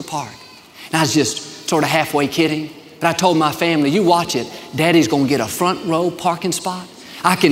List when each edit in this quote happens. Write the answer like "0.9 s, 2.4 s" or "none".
none